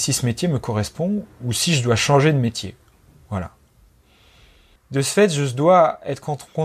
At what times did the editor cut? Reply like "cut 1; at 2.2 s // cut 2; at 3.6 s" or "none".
cut 1; at 4.8 s